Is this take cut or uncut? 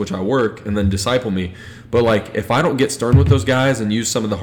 uncut